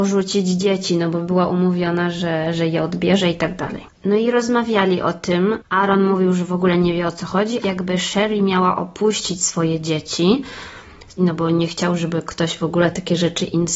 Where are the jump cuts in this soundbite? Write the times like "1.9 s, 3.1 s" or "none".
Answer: 5.6 s, 7.6 s, 11.2 s